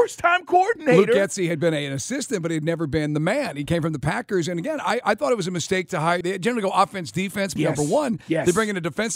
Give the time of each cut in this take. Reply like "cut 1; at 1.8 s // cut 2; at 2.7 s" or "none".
cut 1; at 6.2 s // cut 2; at 7.6 s